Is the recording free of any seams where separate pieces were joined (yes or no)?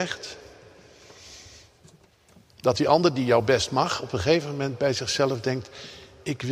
yes